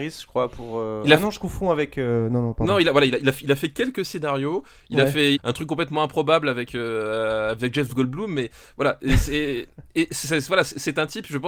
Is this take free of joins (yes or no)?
no